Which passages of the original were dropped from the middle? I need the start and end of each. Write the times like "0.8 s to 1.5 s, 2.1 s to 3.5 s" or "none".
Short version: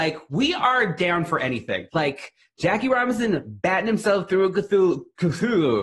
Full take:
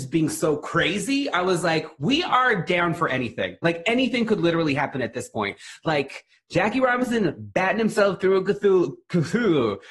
3.6 s to 5.8 s

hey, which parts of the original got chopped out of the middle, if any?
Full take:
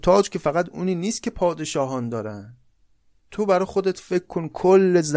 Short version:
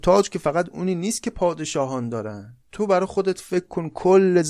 2.6 s to 3.2 s

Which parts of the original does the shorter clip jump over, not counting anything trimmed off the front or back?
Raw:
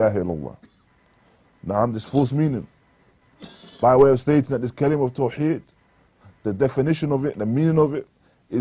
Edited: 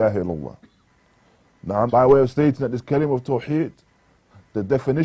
1.9 s to 3.8 s

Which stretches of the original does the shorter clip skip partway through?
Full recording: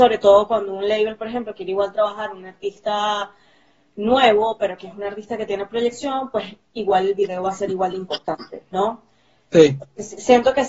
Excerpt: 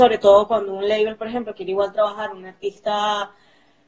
none

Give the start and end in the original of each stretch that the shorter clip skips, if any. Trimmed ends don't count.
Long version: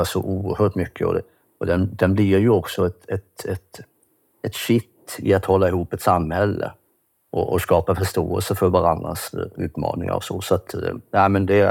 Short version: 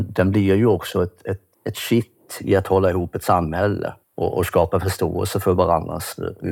3.4 s to 4.3 s, 6.8 s to 7.2 s

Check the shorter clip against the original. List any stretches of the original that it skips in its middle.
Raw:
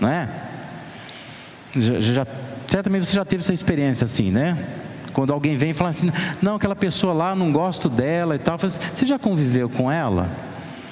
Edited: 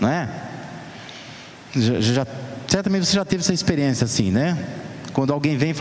none

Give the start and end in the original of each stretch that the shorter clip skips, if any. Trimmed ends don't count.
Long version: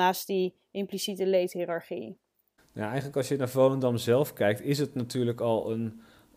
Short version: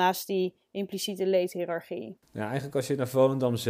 2.2 s to 2.6 s

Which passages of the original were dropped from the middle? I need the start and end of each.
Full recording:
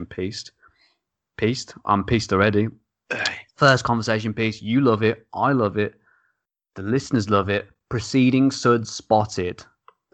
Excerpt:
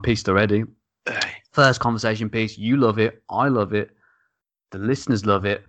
none

